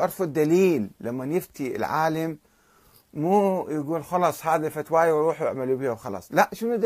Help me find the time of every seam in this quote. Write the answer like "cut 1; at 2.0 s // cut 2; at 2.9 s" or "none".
none